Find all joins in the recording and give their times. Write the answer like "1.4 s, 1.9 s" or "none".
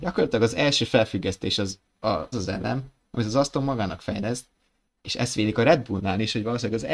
2.3 s, 4.9 s